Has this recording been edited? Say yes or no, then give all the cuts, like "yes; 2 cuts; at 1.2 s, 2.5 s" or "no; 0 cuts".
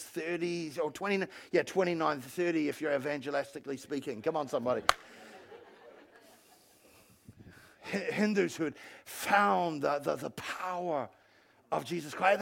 no; 0 cuts